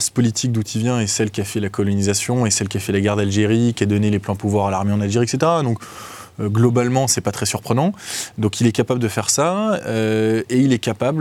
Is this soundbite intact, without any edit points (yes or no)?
yes